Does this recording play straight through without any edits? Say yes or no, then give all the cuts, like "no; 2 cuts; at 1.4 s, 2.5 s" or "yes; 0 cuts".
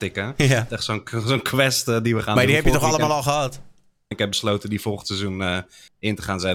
no; 1 cut; at 4.1 s